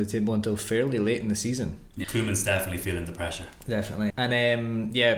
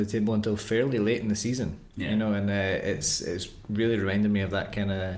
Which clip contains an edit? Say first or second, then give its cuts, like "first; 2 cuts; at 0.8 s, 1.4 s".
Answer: first; 2 cuts; at 2.0 s, 4.1 s